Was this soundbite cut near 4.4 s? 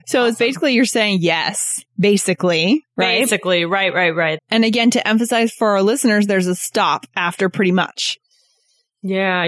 yes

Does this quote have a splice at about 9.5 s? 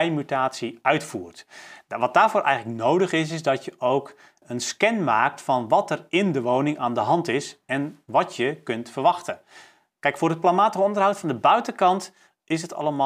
no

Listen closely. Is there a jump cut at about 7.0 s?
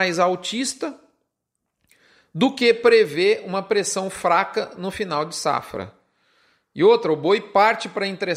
no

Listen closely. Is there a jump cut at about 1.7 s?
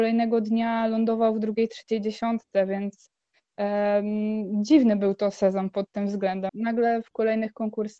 no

